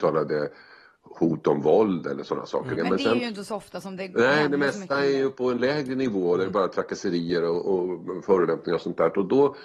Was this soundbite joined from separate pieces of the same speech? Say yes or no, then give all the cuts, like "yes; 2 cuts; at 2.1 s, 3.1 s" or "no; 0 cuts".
yes; 1 cut; at 2.8 s